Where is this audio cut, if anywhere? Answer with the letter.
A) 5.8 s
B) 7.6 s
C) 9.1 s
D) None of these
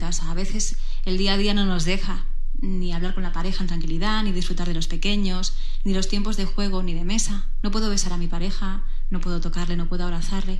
B